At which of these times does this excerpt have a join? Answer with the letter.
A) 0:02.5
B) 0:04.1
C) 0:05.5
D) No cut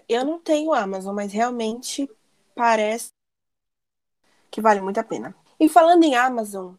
C